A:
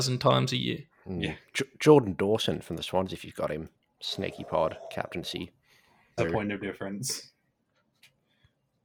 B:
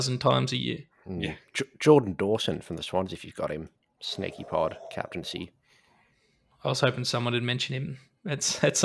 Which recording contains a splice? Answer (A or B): A